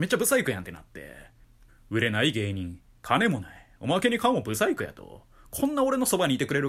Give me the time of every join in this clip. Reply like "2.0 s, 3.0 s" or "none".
1.7 s